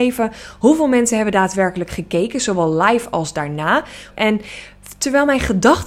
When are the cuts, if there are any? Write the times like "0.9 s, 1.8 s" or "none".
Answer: 4.1 s